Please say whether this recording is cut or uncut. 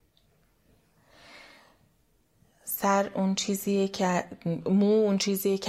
uncut